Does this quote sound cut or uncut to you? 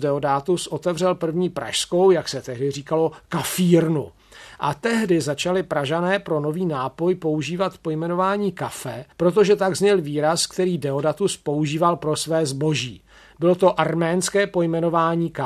cut